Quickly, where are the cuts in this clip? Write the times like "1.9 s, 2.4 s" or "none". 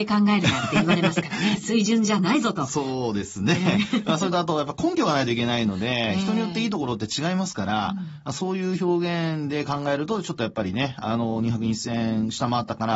none